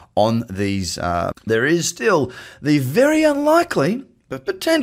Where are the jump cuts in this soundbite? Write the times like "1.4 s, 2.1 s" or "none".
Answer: 1.3 s